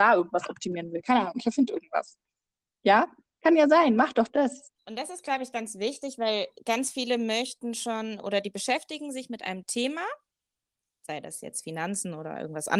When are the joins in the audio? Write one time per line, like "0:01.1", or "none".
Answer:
0:04.8